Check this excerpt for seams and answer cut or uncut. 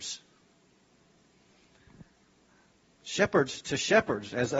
uncut